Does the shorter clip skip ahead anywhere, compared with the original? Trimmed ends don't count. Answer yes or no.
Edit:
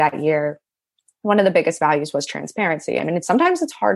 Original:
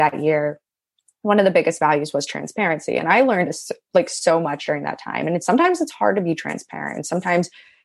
yes